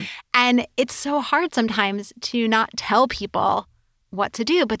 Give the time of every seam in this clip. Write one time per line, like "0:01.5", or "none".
none